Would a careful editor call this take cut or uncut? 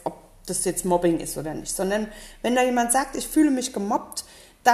uncut